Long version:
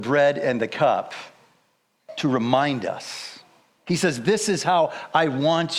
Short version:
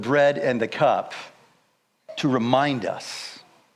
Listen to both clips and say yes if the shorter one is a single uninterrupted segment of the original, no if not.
yes